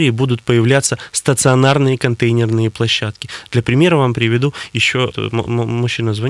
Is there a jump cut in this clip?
yes; 1 cut; at 5.1 s

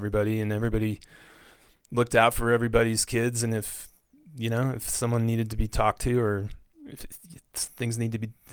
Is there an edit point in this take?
no; 0 cuts

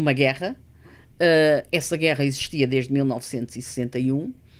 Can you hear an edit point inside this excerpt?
no; 0 cuts

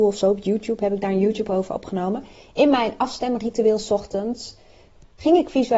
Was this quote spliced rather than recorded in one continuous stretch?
no; 0 cuts

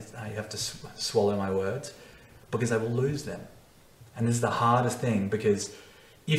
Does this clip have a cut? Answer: no; 0 cuts

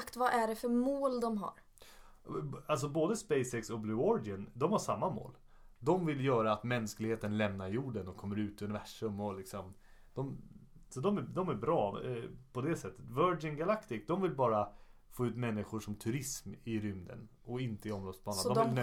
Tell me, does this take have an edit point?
no; 0 cuts

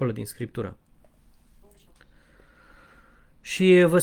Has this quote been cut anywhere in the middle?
no; 0 cuts

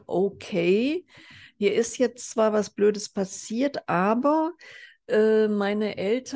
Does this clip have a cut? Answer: no; 0 cuts

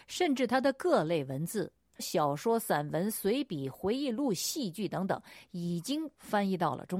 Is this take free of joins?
no; 1 cut; at 2.0 s

